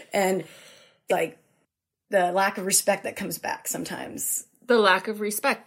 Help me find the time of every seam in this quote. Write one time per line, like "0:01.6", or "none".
0:01.1